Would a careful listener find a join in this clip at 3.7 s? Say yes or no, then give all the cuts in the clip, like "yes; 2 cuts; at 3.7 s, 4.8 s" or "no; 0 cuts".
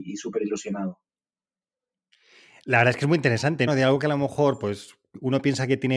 yes; 1 cut; at 3.7 s